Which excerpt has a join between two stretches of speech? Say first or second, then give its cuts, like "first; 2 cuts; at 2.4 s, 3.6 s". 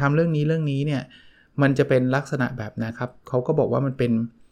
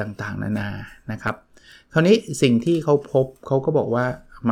first; 1 cut; at 2.9 s